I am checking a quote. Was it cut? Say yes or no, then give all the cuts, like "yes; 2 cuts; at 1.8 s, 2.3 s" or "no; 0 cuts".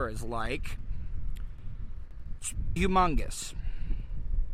yes; 1 cut; at 2.8 s